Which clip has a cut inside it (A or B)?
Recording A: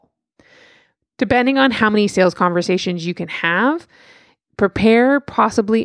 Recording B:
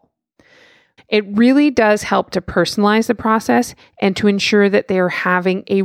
B